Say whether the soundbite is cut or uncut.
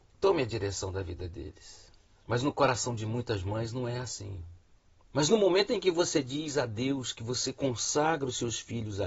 cut